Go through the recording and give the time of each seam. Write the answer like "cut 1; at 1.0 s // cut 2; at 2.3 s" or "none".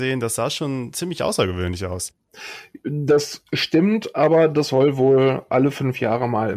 none